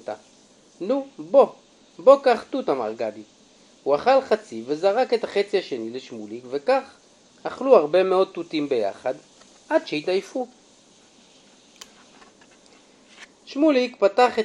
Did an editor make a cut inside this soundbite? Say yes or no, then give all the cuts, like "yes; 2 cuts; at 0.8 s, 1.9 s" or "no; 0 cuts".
no; 0 cuts